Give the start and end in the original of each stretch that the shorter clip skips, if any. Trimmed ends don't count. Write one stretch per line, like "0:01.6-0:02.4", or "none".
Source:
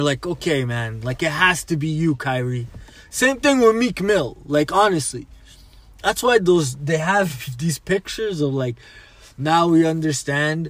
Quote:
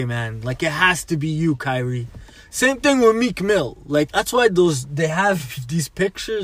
0:04.7-0:06.0